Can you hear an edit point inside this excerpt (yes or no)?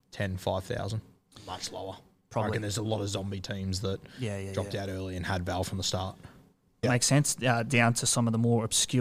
yes